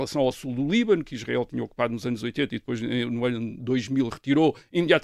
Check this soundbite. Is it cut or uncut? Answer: uncut